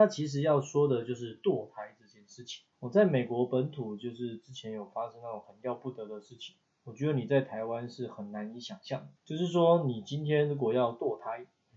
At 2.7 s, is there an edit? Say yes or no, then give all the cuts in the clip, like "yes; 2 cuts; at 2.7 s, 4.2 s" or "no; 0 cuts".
yes; 2 cuts; at 2.7 s, 9.2 s